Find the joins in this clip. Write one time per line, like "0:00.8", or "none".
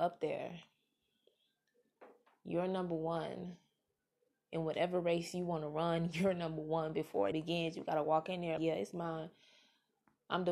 0:07.3
0:08.6